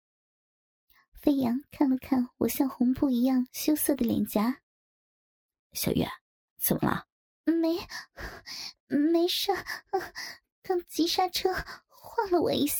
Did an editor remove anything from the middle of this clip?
yes; 2 cuts; at 7.3 s, 10.5 s

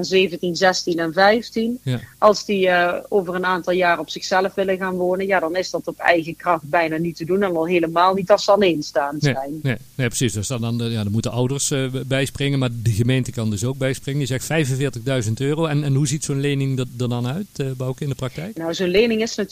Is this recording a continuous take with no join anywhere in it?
yes; 0 cuts

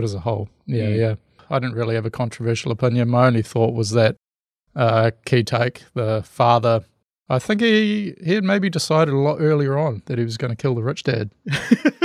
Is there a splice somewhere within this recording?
no; 0 cuts

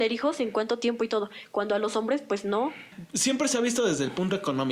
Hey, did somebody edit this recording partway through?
no; 0 cuts

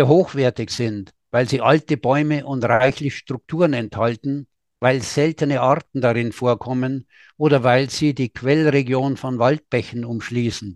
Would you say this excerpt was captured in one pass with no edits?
yes; 0 cuts

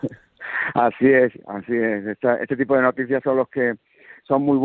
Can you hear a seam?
no; 0 cuts

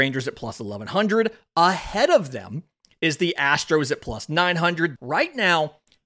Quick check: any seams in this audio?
yes; 1 cut; at 5.0 s

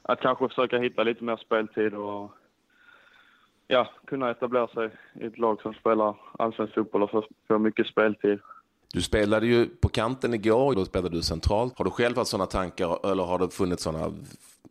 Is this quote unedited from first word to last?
no; 3 cuts; at 8.8 s, 10.7 s, 11.7 s

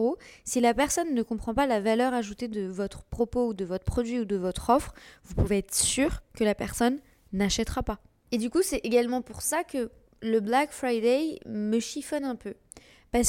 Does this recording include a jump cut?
no; 0 cuts

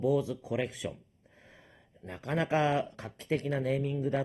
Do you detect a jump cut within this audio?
no; 0 cuts

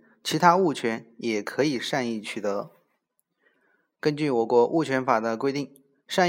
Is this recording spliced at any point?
no; 0 cuts

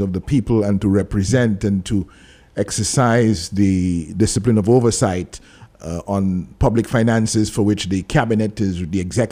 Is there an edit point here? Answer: no; 0 cuts

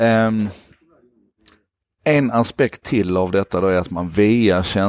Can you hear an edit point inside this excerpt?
no; 0 cuts

